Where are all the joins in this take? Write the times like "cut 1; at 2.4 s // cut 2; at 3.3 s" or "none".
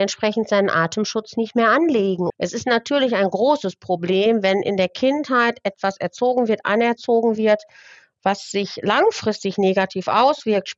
cut 1; at 2.3 s